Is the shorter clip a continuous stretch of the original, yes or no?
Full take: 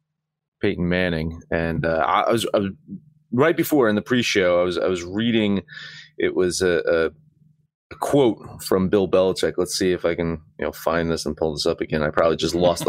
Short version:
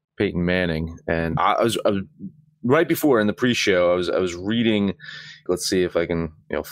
no